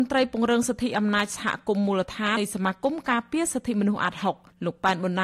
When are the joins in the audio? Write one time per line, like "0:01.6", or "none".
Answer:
0:02.4

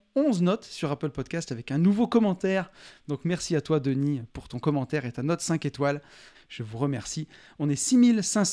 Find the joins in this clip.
0:06.3

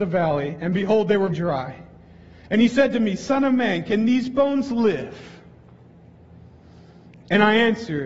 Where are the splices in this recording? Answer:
0:01.3

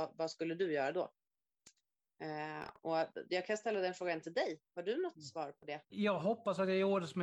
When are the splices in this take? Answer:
0:05.9

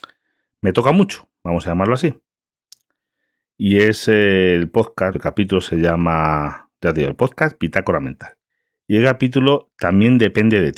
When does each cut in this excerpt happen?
0:05.1

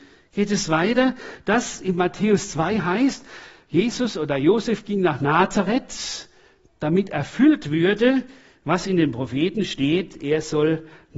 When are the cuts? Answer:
none

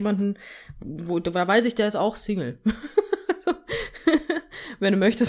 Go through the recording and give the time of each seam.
none

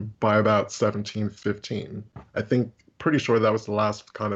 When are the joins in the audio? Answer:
none

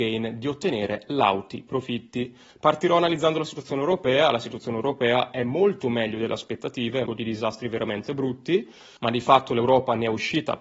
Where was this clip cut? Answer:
0:02.5
0:07.1

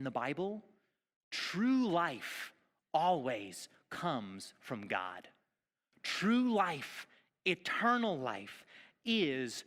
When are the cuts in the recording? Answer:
none

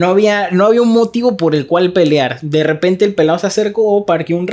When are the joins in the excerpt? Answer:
none

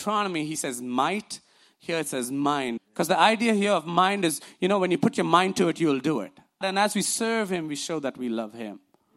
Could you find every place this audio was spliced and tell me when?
0:02.8
0:06.6

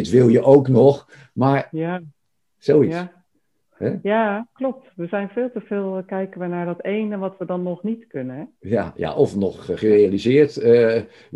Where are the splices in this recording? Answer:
none

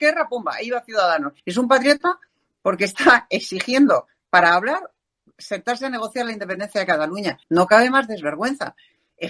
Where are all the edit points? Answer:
0:01.4
0:07.4

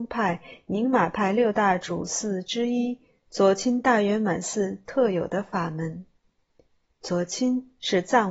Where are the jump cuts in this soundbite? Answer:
none

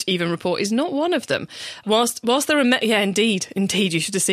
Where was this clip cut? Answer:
0:01.8

